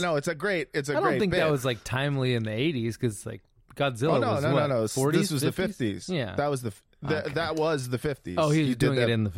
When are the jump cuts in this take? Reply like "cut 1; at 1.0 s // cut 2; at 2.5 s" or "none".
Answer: none